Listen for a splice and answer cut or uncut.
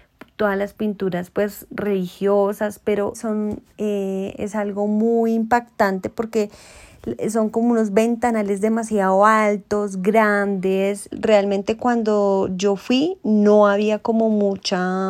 cut